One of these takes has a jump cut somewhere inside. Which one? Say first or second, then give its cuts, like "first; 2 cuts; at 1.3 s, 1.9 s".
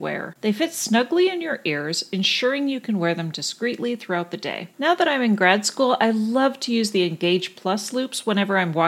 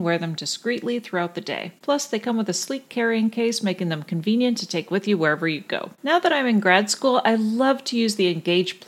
first; 1 cut; at 4.7 s